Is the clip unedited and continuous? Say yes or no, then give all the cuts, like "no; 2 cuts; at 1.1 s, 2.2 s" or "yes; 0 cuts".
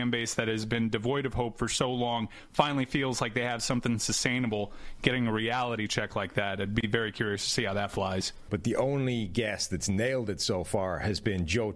no; 1 cut; at 8.5 s